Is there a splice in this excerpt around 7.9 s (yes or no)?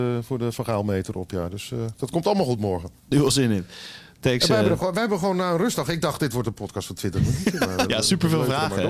yes